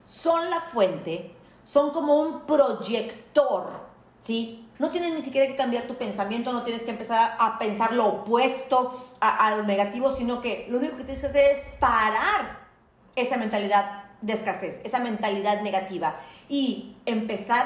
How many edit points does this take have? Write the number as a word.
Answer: one